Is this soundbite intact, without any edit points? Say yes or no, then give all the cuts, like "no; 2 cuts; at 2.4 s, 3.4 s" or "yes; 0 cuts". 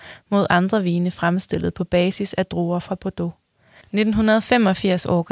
no; 1 cut; at 3.8 s